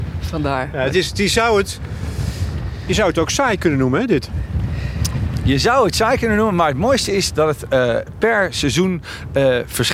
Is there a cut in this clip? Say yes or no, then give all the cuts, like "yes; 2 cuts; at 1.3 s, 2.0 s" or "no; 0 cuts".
no; 0 cuts